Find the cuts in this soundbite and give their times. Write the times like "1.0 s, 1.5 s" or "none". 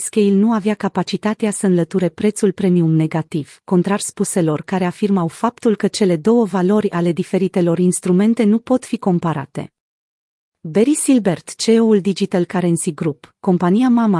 3.6 s